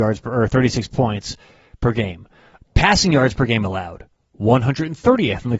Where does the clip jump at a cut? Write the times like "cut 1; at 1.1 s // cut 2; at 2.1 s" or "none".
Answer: cut 1; at 2.6 s